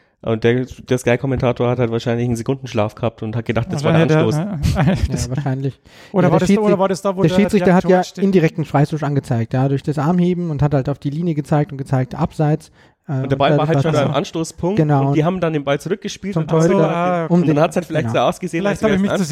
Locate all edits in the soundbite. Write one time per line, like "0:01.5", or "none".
none